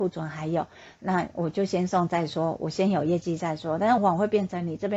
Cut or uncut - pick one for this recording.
cut